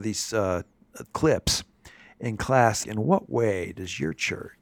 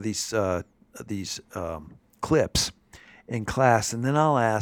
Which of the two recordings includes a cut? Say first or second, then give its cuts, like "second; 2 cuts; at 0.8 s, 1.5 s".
first; 2 cuts; at 1.0 s, 2.8 s